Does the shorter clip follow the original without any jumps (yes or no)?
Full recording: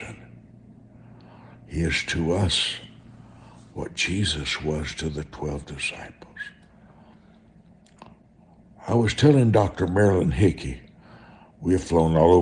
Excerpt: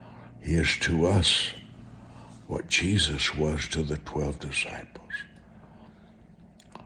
yes